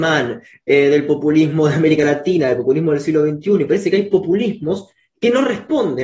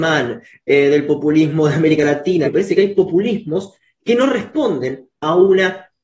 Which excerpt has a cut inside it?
second; 1 cut; at 2.4 s

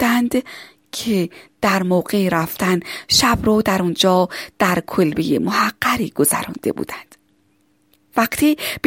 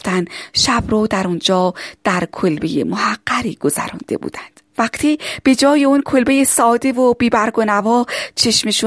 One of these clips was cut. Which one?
second; 1 cut; at 4.7 s

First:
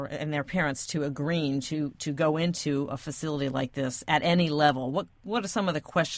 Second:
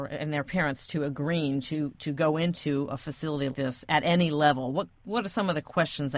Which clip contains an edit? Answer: second; 1 cut; at 3.5 s

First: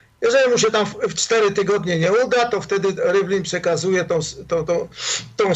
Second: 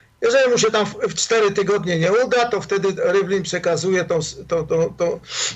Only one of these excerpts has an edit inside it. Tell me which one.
first; 1 cut; at 4.6 s

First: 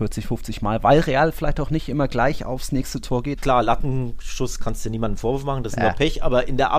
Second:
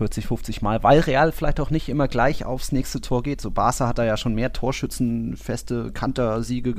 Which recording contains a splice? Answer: first; 1 cut; at 3.4 s

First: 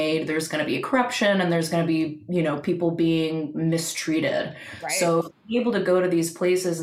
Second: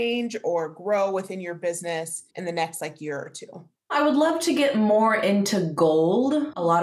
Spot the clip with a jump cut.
second; 1 cut; at 2.3 s

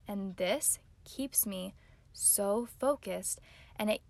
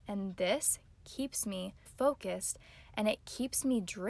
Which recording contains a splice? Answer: second; 1 cut; at 1.9 s

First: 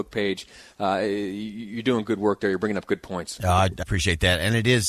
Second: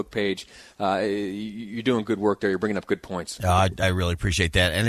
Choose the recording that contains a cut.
first; 1 cut; at 3.8 s

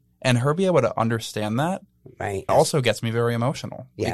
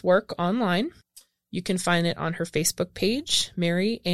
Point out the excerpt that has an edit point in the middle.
first; 1 cut; at 2.5 s

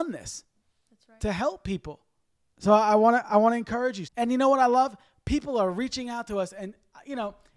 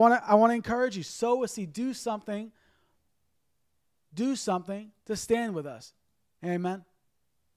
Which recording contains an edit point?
first; 2 cuts; at 2.4 s, 4.1 s

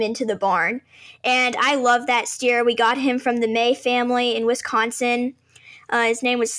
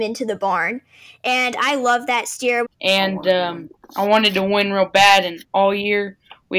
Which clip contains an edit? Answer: second; 1 cut; at 2.6 s

